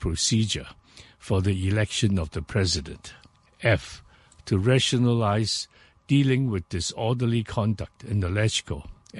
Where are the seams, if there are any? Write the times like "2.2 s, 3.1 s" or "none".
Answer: 3.5 s